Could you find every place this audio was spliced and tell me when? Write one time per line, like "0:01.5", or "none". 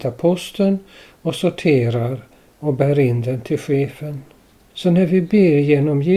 0:04.7